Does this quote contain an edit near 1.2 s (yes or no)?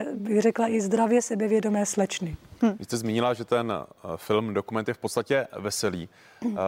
no